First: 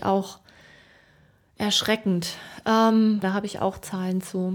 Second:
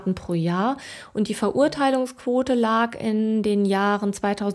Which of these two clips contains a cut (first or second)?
first